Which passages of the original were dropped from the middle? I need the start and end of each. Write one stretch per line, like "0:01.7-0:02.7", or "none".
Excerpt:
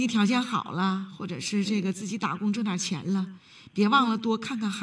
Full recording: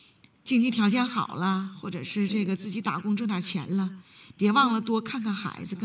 none